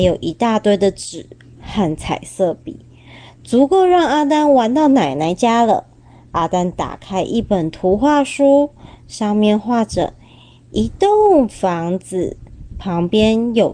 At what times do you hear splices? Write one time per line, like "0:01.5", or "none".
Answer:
none